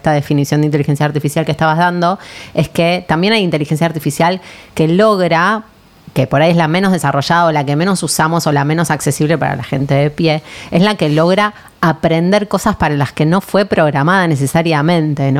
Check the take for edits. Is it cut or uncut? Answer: uncut